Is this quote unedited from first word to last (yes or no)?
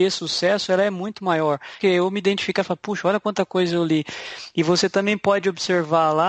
no